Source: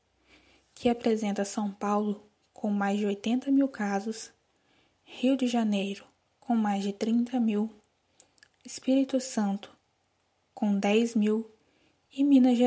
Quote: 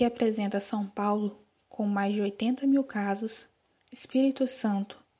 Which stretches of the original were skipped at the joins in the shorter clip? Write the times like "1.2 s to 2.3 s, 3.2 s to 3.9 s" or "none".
4.6 s to 8.5 s